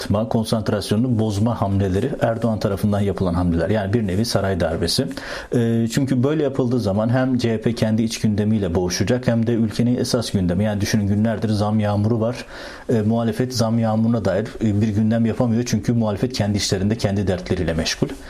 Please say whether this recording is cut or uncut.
uncut